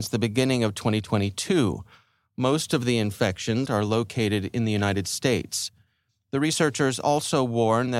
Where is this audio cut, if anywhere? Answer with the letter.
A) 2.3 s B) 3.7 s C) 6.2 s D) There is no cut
B